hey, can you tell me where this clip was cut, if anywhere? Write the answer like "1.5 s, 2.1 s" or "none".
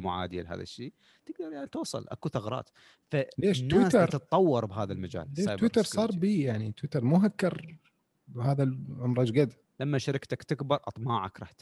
9.7 s

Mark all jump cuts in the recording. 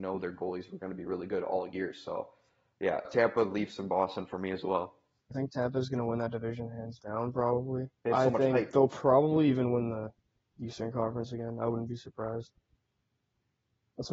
3.1 s, 5.3 s, 7.9 s

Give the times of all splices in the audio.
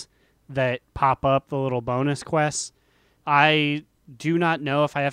3.2 s

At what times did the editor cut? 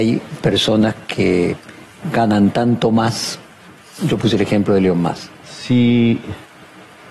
5.4 s

